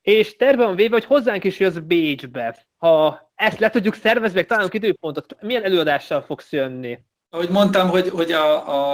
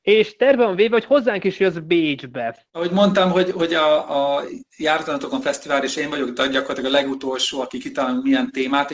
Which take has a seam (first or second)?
second